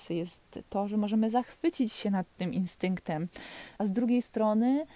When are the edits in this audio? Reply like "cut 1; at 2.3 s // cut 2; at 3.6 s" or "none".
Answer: cut 1; at 3.8 s